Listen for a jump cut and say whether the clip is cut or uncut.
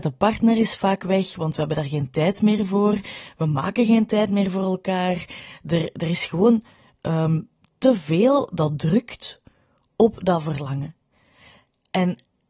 uncut